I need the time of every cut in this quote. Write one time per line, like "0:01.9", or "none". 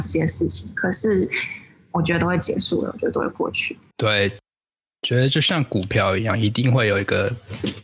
0:03.9